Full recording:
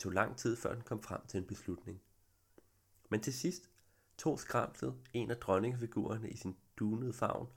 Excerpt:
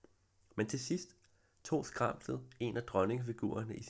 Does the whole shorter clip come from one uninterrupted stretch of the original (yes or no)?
yes